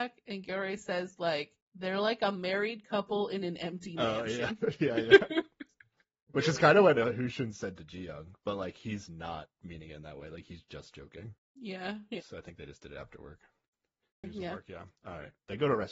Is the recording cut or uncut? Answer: cut